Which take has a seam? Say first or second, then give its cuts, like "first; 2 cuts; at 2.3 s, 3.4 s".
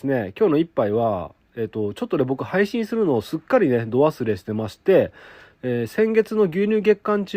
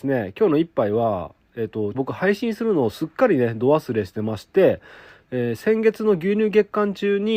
second; 1 cut; at 1.9 s